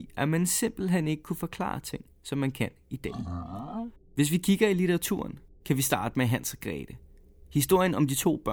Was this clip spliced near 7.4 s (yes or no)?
no